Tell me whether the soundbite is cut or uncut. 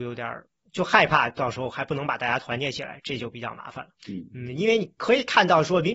cut